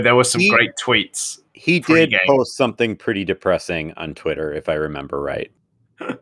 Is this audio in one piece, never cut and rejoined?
no; 1 cut; at 1.5 s

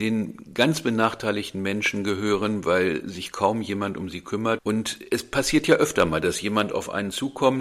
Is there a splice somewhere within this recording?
yes; 1 cut; at 4.6 s

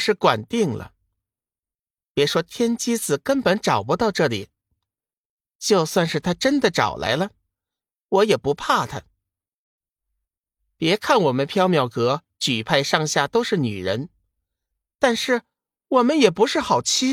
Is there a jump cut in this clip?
no; 0 cuts

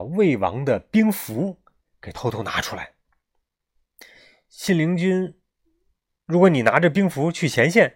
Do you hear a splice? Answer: no; 0 cuts

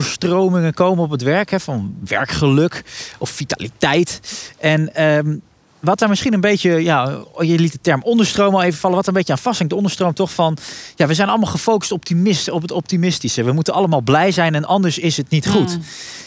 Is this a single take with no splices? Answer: yes; 0 cuts

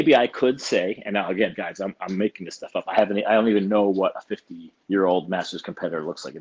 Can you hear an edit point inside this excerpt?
yes; 1 cut; at 4.8 s

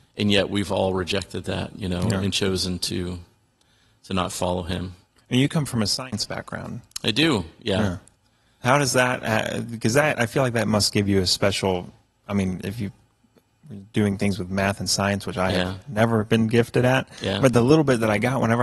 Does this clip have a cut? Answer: no; 0 cuts

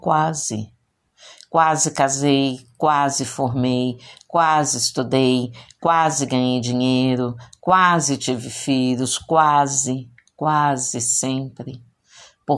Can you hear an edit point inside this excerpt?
no; 0 cuts

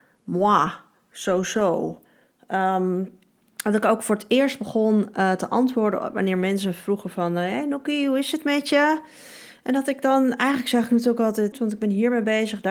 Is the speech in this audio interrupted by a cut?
yes; 1 cut; at 11.5 s

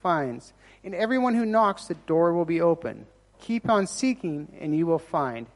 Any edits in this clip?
yes; 1 cut; at 3.3 s

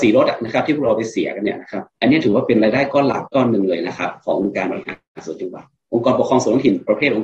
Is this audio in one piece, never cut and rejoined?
no; 2 cuts; at 1.9 s, 3.2 s

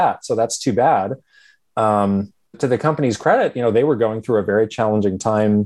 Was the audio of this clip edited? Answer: yes; 1 cut; at 2.5 s

